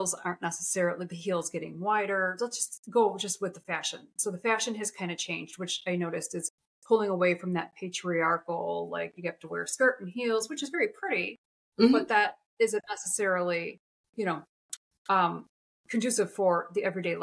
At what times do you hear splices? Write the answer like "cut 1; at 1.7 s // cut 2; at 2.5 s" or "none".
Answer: none